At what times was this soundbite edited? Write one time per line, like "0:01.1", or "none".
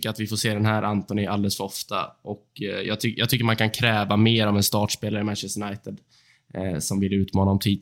none

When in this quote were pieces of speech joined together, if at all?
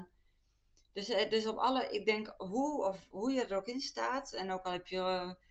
none

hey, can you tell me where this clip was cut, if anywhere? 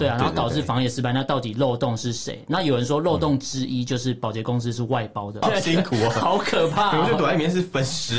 0:05.4

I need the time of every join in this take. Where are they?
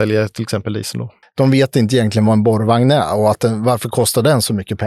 0:01.2

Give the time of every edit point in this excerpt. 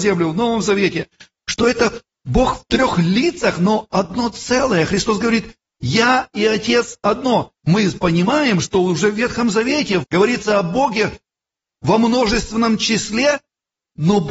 0:07.6
0:10.0

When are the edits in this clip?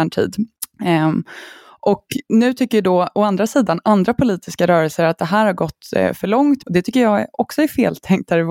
0:06.6

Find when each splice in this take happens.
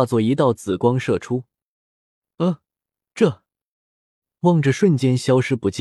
none

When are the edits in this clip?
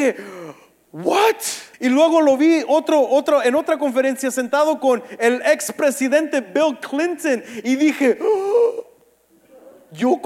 0:01.7

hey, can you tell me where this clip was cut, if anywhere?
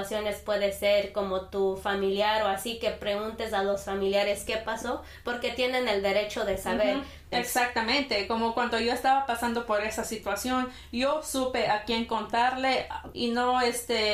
0:07.3
0:13.1

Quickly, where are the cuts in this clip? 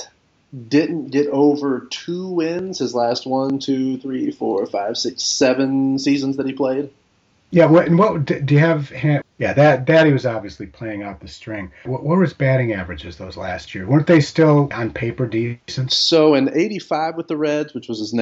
0:09.2
0:11.9
0:14.7

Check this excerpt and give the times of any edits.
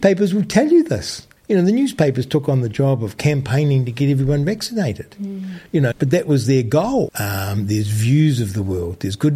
0:01.4
0:05.9
0:07.1

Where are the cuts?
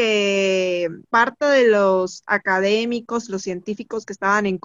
0:01.1

